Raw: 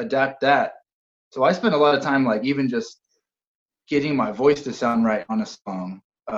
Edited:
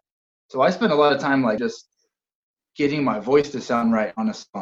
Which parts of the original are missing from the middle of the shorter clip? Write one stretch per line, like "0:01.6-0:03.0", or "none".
0:02.4-0:02.7